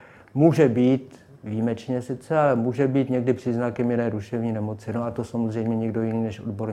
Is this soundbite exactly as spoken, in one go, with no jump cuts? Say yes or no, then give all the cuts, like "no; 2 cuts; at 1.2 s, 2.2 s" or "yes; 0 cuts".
yes; 0 cuts